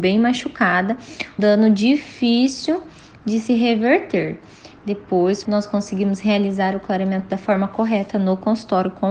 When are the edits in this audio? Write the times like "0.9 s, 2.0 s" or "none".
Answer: 1.4 s, 5.4 s